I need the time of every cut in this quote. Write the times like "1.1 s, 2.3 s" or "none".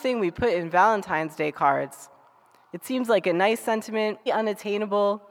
4.3 s